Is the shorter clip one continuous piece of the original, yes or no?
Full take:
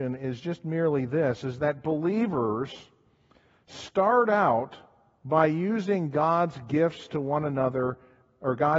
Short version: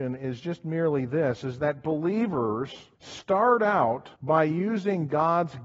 no